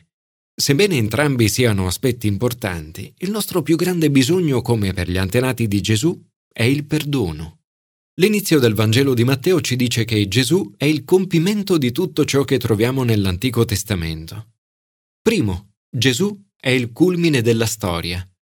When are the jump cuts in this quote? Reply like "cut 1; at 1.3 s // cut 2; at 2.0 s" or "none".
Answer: cut 1; at 7.9 s